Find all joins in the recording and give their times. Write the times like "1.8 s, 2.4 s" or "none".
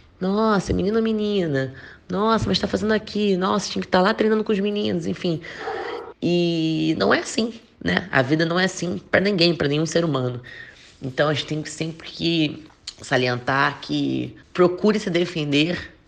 6.1 s

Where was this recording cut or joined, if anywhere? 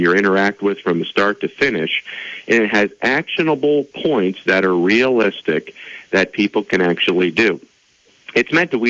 none

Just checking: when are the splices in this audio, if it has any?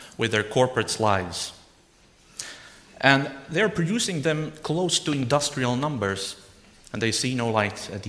none

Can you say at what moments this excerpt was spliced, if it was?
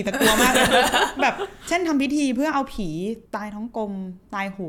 3.3 s

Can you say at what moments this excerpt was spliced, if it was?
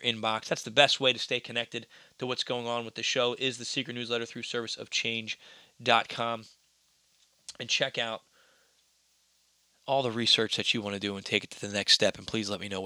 none

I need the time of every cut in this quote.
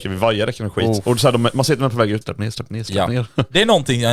2.2 s

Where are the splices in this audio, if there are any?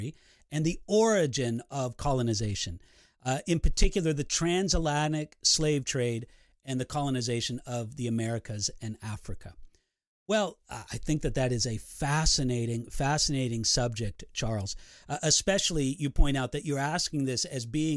none

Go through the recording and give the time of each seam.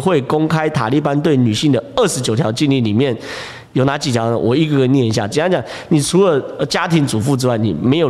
5.3 s

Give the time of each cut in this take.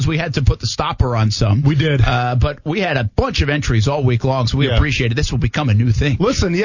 none

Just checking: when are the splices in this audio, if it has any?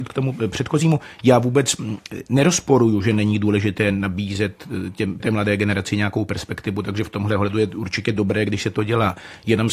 5.2 s

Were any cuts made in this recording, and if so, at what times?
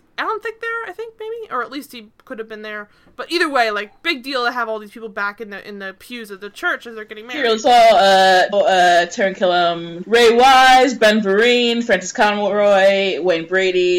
8.5 s, 10.0 s

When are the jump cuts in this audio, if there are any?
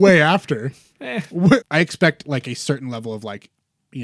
1.6 s

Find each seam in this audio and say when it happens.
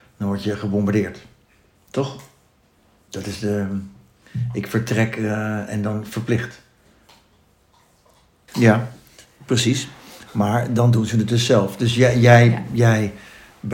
3.1 s, 8.5 s

